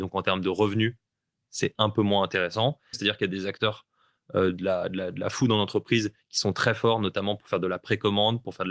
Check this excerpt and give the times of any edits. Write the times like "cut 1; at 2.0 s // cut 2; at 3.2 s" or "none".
cut 1; at 2.9 s